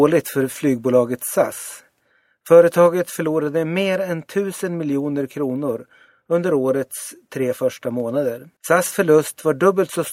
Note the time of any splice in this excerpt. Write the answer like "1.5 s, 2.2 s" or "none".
8.6 s